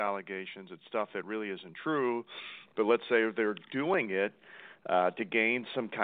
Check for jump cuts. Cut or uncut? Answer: uncut